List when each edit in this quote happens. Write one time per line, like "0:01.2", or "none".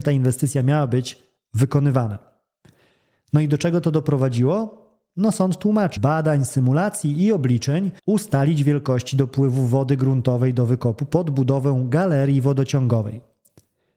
0:06.0
0:08.0